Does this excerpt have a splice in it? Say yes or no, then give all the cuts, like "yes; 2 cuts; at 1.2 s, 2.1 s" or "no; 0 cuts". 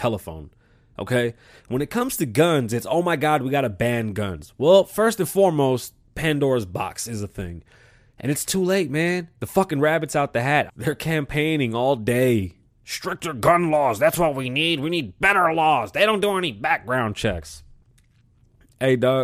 yes; 3 cuts; at 1.6 s, 10.7 s, 12.6 s